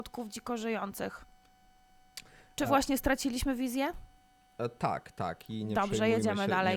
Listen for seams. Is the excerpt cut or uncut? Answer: uncut